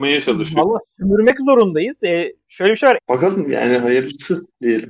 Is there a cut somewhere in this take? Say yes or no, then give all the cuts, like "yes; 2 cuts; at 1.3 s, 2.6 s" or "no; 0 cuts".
yes; 1 cut; at 3.0 s